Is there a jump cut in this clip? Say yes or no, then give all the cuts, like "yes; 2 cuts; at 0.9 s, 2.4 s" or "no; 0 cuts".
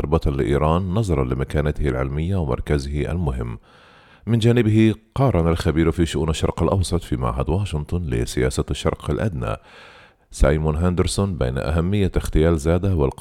no; 0 cuts